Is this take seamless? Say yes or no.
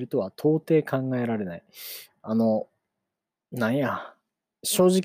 yes